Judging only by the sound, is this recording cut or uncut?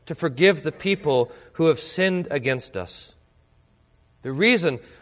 cut